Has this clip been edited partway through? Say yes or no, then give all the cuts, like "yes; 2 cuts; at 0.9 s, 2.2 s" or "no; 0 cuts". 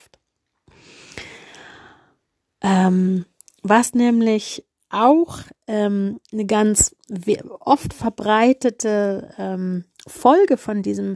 no; 0 cuts